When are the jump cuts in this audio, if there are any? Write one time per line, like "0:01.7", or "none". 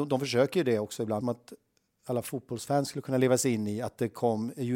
0:01.2